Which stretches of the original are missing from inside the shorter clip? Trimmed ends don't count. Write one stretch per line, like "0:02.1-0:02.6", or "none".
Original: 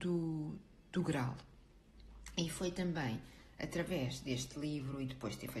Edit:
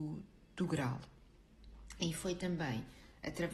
none